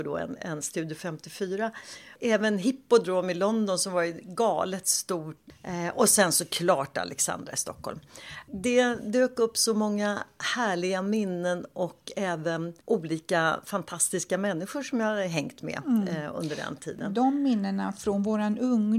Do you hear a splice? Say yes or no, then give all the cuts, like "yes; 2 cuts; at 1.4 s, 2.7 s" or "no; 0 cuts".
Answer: yes; 1 cut; at 12.8 s